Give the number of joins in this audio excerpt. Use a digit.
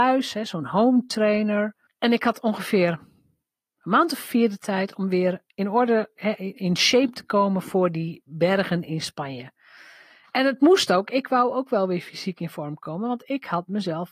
1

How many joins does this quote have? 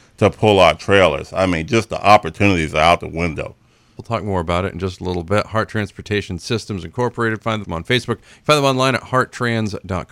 2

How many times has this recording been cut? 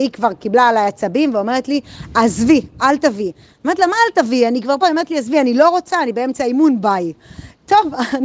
0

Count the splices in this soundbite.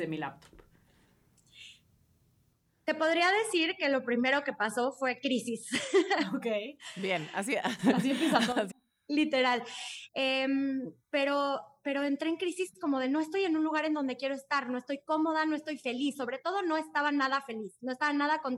2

